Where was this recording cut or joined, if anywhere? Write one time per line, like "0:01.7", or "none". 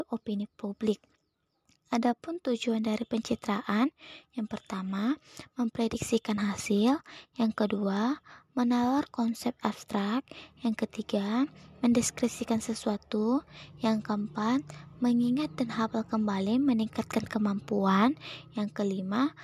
none